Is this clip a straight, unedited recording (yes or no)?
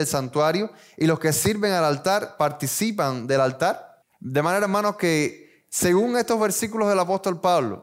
no